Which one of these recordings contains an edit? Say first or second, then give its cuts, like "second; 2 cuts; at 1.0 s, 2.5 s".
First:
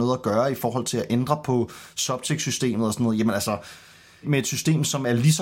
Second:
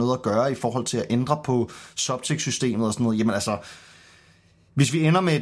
first; 1 cut; at 4.2 s